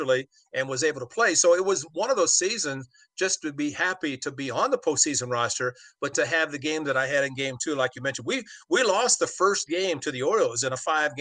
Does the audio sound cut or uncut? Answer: cut